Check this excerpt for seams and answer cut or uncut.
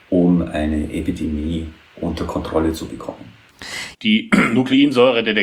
cut